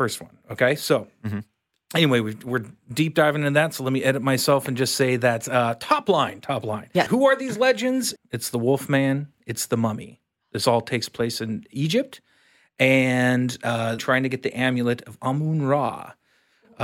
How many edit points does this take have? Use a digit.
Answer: 3